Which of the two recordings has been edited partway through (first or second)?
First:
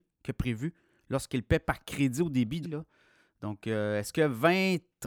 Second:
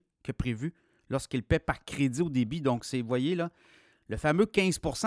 first